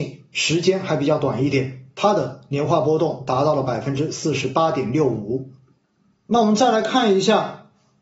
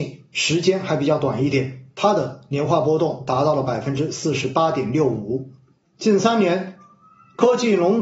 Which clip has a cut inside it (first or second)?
second